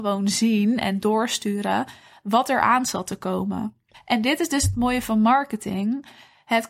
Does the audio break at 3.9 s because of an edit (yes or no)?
yes